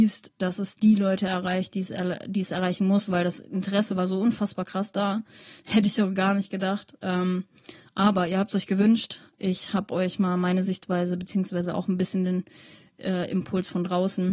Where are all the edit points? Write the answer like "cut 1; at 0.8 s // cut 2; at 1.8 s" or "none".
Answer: none